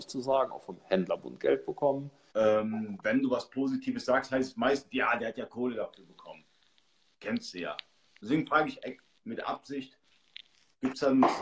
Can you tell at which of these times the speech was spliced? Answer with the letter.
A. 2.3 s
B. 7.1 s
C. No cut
A